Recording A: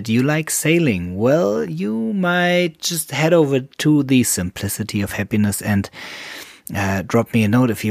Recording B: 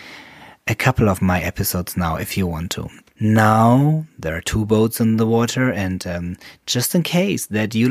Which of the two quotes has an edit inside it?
B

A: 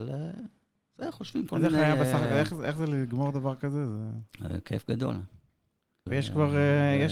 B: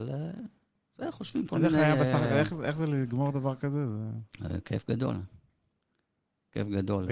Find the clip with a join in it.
A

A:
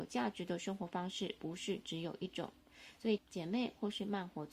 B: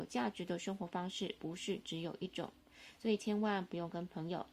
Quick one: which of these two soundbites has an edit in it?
A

